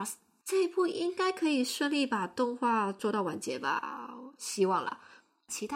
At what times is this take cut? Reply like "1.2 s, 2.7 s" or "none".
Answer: none

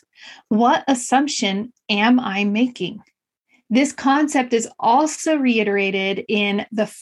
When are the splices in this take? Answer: none

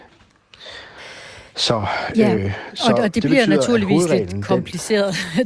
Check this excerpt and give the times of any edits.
none

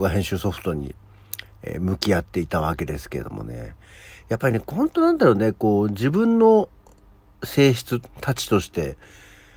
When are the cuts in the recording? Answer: none

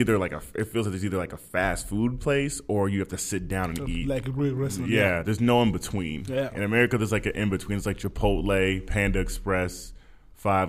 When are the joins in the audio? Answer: none

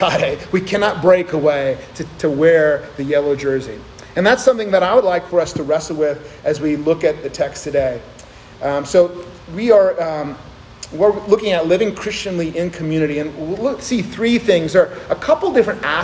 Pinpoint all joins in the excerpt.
none

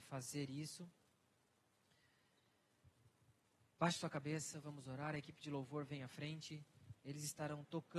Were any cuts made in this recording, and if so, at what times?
3.7 s

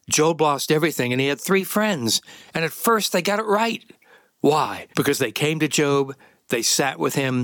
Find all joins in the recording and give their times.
4.9 s

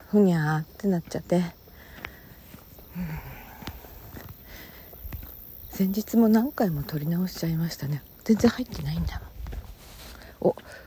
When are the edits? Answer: 1.2 s

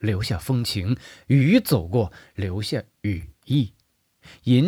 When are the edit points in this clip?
none

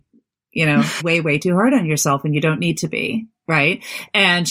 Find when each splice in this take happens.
1.0 s

